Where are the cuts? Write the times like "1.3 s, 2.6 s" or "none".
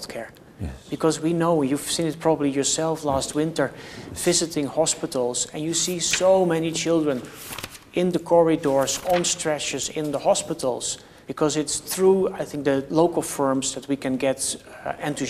11.2 s, 12.9 s